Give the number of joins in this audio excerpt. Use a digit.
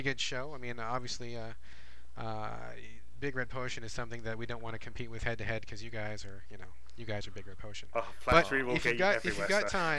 0